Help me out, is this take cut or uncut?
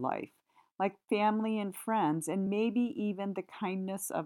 uncut